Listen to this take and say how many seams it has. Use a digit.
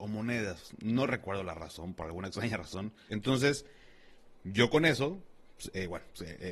1